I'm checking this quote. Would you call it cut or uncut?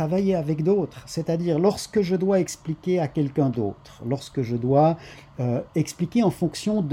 uncut